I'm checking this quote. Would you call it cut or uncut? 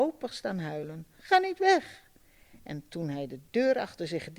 cut